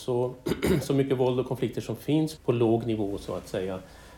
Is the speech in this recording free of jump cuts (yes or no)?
no